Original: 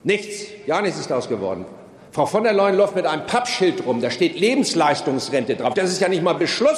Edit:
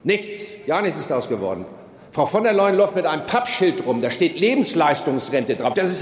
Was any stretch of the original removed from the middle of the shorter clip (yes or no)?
no